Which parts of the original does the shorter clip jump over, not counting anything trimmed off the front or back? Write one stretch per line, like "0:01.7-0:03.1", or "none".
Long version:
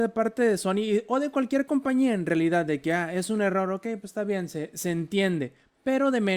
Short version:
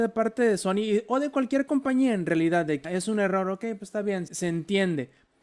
0:02.8-0:03.1
0:04.5-0:04.7